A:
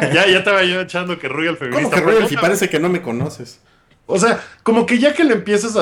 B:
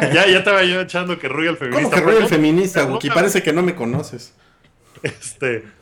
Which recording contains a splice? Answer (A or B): A